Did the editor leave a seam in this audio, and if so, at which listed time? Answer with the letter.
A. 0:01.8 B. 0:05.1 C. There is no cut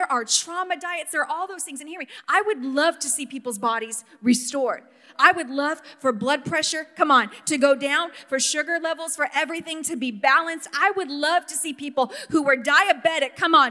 C